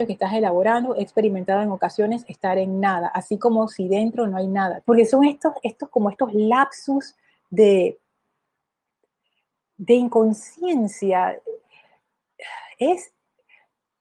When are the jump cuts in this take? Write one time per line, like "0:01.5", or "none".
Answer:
0:04.8